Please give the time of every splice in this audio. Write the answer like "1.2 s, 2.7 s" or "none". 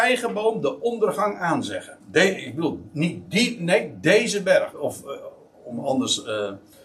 2.0 s, 4.7 s